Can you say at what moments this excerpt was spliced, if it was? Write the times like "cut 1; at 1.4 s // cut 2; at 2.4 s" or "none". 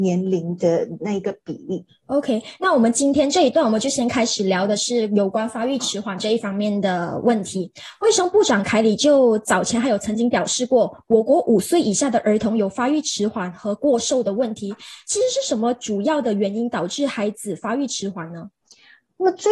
none